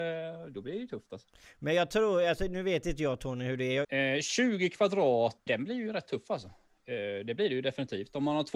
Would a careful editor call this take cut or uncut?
cut